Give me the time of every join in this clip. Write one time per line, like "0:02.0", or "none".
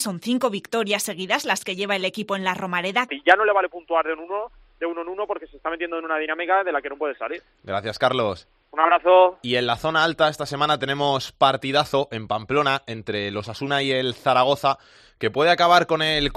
0:03.1